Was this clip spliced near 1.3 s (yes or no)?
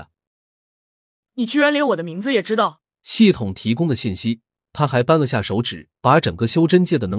no